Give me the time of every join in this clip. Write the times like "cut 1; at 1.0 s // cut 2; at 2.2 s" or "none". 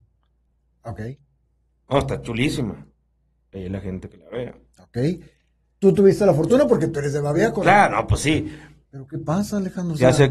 cut 1; at 8.8 s